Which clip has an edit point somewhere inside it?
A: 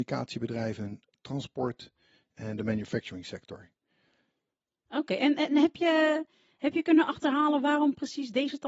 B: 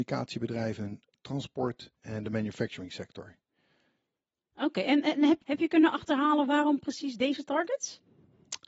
B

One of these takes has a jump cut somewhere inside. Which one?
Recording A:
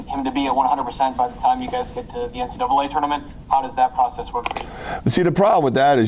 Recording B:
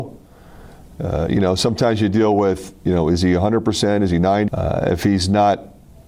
B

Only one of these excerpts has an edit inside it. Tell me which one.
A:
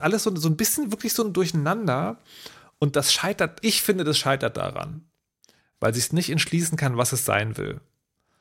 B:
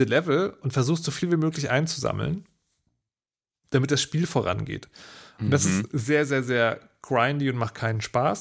A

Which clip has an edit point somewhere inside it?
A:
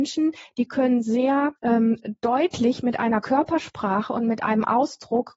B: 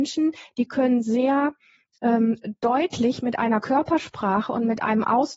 A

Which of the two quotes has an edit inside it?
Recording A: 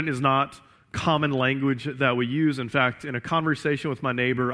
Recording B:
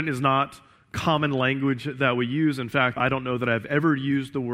B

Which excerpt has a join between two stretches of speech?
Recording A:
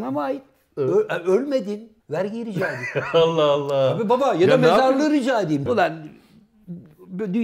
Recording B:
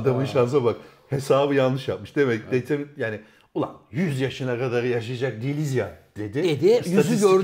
A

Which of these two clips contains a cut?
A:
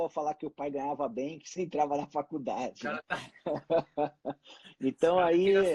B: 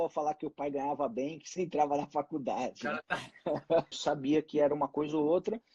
B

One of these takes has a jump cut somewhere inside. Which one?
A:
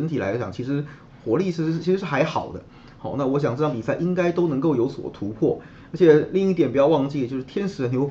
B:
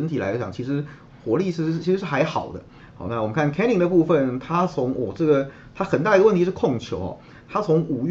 B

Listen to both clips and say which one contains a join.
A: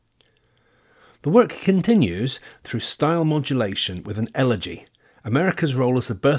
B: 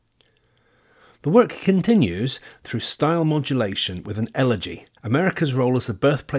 B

